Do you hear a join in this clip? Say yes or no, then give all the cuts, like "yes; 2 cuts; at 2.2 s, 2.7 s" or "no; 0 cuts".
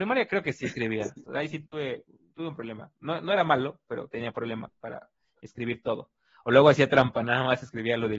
yes; 1 cut; at 1.2 s